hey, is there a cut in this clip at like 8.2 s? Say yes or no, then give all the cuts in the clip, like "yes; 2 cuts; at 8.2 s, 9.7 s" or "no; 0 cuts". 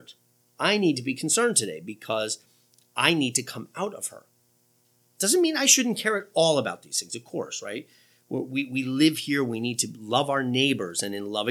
no; 0 cuts